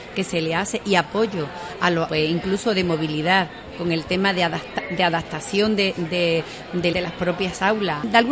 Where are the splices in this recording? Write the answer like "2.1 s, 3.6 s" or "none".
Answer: 2.1 s, 6.9 s